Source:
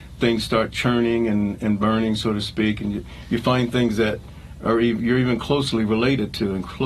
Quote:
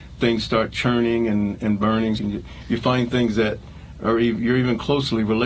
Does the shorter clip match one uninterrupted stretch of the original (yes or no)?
no